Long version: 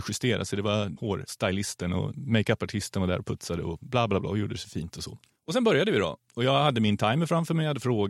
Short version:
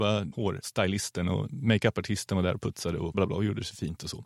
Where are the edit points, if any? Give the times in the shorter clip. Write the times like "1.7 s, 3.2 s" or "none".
3.1 s